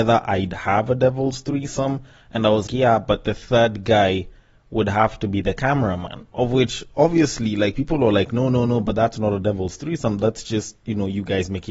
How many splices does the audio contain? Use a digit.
1